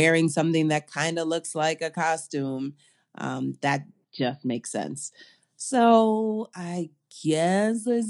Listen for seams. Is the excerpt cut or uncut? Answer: uncut